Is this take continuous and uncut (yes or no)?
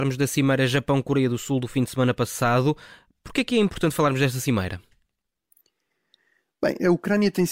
yes